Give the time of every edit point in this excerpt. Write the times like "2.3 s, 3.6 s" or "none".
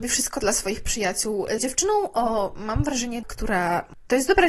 1.6 s, 3.2 s